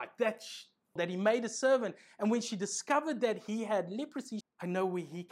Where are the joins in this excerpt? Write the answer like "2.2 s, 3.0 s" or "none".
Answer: 1.0 s, 4.4 s